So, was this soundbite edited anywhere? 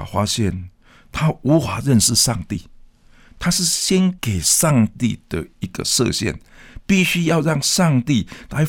no; 0 cuts

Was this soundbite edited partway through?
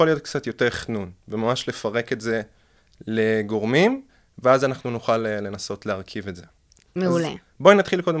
no; 0 cuts

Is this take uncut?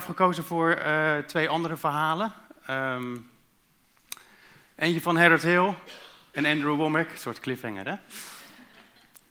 yes; 0 cuts

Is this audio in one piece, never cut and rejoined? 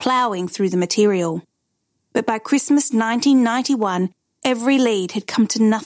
yes; 0 cuts

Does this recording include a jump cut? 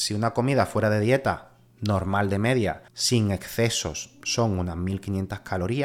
yes; 1 cut; at 2.9 s

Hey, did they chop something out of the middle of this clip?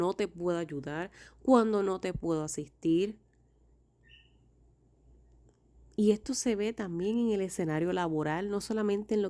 no; 0 cuts

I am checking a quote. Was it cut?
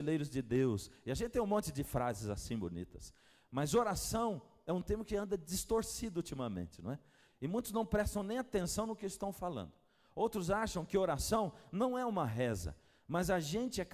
yes; 1 cut; at 7.3 s

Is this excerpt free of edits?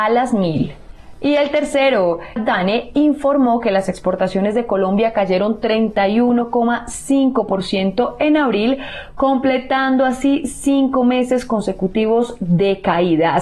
no; 1 cut; at 2.4 s

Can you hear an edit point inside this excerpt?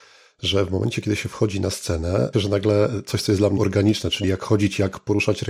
yes; 2 cuts; at 2.3 s, 3.6 s

